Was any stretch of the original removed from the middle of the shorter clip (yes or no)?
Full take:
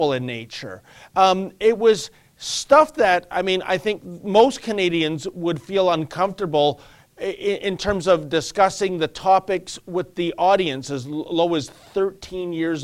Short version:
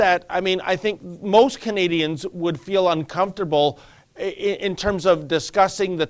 no